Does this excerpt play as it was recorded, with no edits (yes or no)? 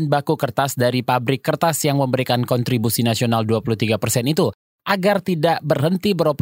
yes